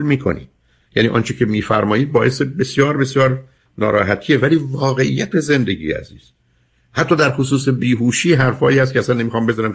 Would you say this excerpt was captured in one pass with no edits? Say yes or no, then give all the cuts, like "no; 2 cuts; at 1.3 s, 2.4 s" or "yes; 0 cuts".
yes; 0 cuts